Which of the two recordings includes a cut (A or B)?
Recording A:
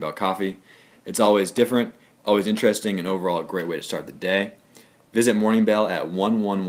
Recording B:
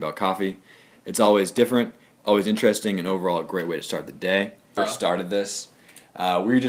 B